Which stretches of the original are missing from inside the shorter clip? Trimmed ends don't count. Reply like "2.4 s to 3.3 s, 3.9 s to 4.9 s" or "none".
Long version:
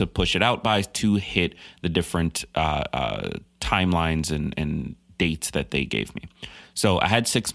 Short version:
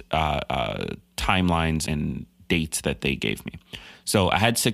4.3 s to 4.5 s